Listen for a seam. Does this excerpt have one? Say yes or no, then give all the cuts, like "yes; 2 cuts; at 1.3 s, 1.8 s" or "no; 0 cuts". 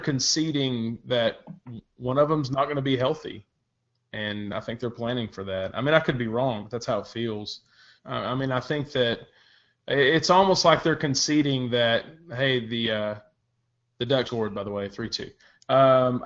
yes; 2 cuts; at 8.0 s, 14.3 s